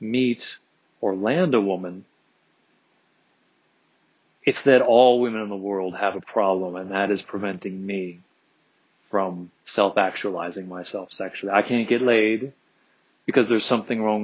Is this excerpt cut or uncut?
cut